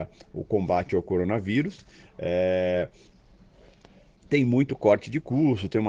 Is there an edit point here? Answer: no; 0 cuts

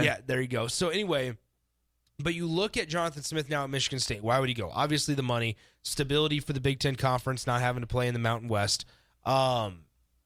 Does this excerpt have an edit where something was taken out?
no; 0 cuts

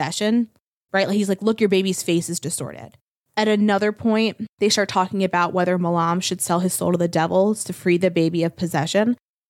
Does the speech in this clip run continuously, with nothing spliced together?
yes; 0 cuts

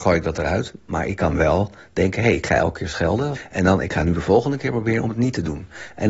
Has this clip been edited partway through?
no; 0 cuts

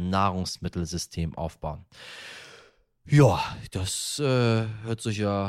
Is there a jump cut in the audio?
no; 0 cuts

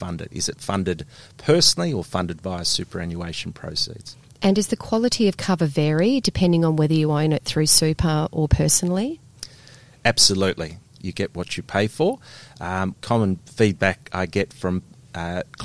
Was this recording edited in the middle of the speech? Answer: yes; 2 cuts; at 10.9 s, 12.9 s

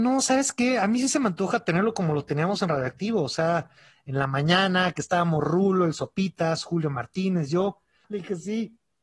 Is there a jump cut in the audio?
yes; 1 cut; at 8.0 s

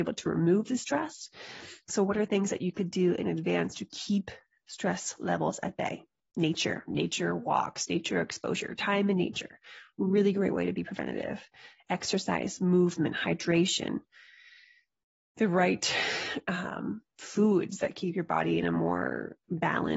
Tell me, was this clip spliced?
no; 0 cuts

